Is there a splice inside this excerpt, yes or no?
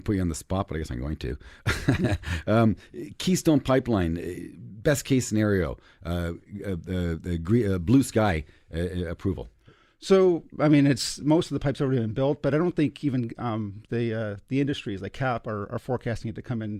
no